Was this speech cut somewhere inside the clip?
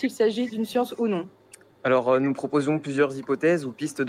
no; 0 cuts

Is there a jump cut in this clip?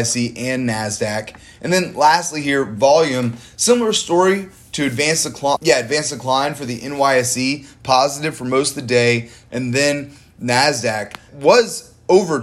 yes; 3 cuts; at 5.6 s, 9.5 s, 11.3 s

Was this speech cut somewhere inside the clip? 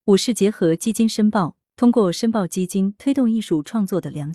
yes; 1 cut; at 1.6 s

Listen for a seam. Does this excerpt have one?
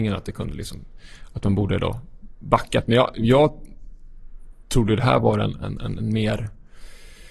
no; 0 cuts

